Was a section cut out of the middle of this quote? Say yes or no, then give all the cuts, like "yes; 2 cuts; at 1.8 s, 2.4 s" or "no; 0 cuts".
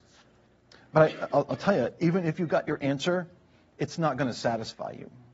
no; 0 cuts